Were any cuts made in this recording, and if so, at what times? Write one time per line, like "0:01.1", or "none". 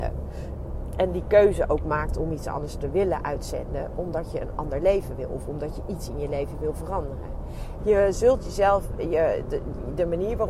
0:07.8